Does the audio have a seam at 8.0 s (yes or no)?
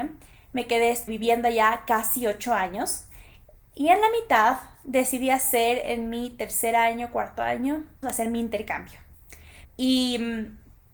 yes